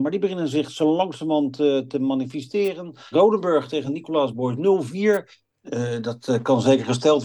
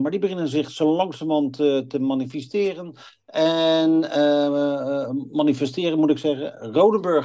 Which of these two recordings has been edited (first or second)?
first